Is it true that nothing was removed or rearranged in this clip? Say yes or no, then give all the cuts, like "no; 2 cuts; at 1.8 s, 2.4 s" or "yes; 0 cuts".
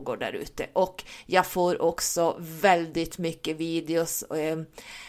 yes; 0 cuts